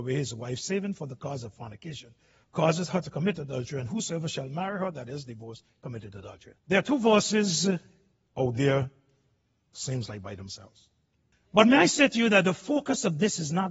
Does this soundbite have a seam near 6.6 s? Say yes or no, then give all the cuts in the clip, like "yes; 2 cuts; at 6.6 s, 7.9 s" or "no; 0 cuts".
yes; 2 cuts; at 6.6 s, 11.3 s